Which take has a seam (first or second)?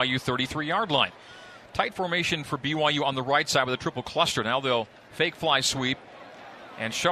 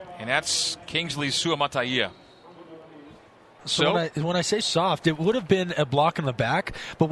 second